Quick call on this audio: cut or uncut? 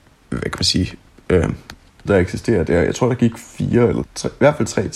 cut